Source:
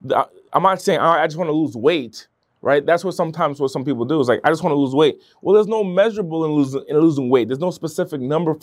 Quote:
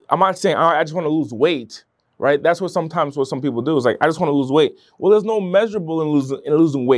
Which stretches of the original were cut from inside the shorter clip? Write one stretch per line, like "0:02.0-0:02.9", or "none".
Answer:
none